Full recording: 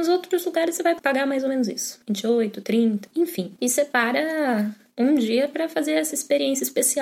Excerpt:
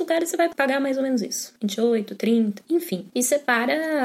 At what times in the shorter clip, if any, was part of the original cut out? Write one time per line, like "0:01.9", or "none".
none